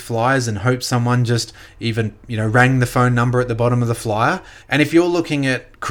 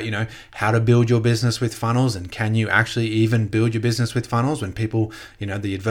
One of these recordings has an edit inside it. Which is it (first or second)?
first